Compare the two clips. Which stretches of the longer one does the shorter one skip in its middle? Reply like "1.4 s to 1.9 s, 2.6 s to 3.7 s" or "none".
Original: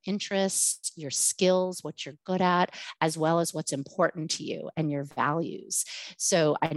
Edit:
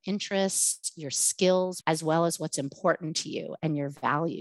1.8 s to 3.0 s